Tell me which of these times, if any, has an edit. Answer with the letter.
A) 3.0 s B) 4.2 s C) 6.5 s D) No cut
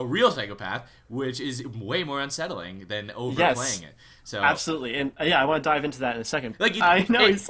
C